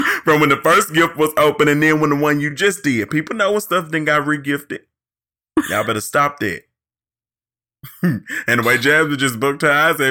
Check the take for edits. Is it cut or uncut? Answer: uncut